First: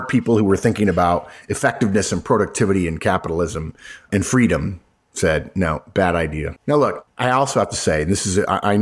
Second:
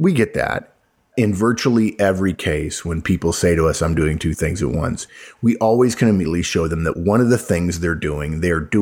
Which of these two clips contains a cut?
first; 1 cut; at 6.6 s

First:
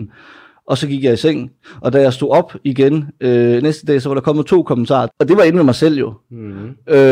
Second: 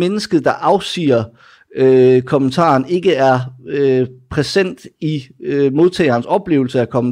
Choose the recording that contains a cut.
first; 1 cut; at 5.1 s

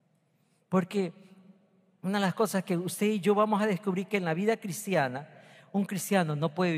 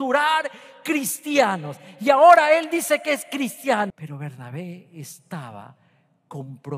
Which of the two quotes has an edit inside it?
second; 1 cut; at 3.9 s

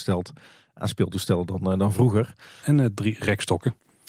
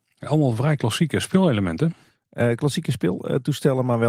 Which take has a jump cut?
first; 1 cut; at 2.6 s

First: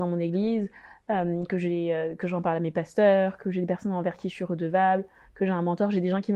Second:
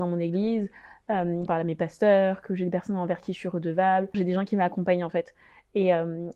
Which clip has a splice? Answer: second; 2 cuts; at 1.5 s, 4.1 s

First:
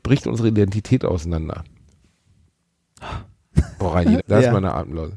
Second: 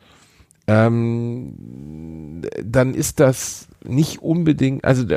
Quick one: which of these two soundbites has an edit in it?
first; 2 cuts; at 2.0 s, 4.2 s

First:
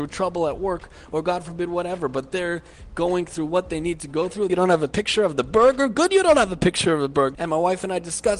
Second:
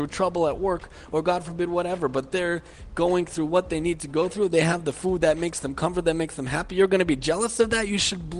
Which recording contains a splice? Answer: first; 2 cuts; at 4.5 s, 7.3 s

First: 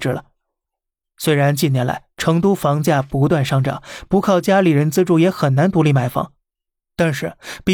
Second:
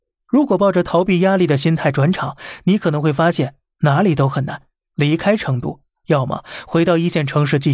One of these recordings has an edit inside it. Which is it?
second; 1 cut; at 4.9 s

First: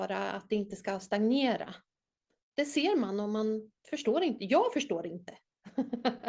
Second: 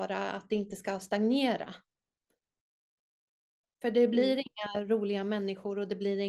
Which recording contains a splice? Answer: first; 1 cut; at 2.4 s

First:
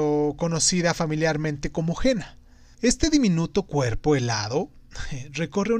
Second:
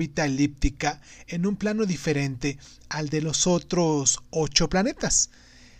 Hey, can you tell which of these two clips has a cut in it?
first; 1 cut; at 2.7 s

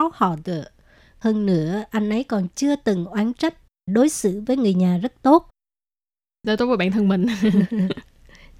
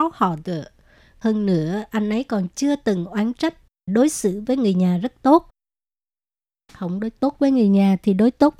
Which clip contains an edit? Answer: first; 1 cut; at 6.4 s

